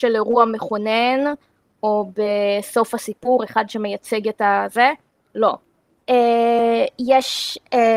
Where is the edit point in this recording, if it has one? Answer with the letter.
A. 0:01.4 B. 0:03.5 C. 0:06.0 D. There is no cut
C